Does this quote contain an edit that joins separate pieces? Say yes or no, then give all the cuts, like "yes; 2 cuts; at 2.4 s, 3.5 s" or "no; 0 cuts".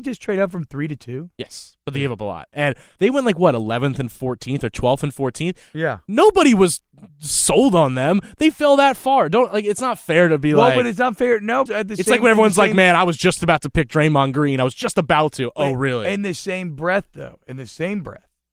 yes; 2 cuts; at 3.0 s, 11.7 s